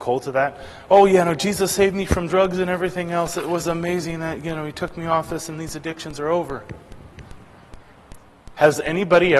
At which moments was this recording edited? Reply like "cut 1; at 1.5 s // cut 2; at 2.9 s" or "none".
none